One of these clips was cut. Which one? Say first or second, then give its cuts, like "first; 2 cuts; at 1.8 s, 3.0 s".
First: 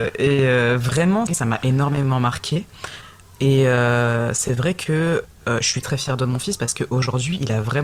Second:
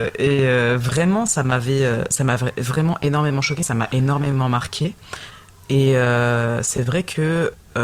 first; 2 cuts; at 1.3 s, 5.8 s